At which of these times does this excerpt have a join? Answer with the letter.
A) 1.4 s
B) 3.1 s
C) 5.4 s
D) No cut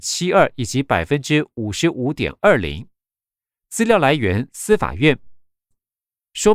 D